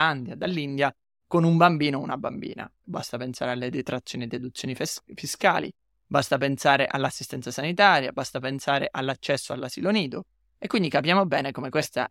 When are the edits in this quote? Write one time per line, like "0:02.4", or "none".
0:02.8